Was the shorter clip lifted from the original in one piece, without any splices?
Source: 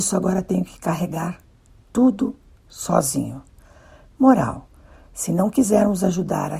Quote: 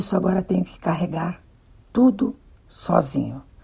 yes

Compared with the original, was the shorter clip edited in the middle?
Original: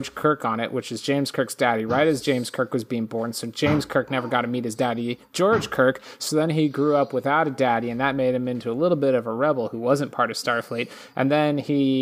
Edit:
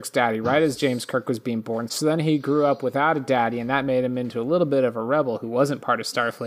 yes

